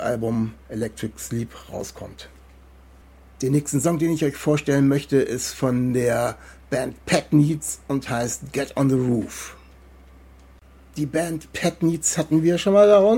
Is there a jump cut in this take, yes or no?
no